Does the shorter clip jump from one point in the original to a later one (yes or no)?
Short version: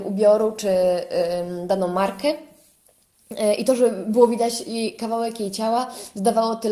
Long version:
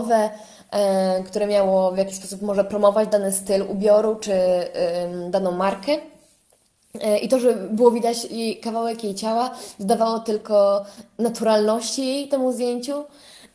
no